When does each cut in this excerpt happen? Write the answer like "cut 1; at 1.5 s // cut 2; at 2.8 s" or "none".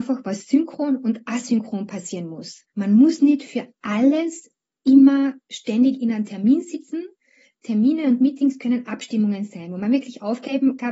none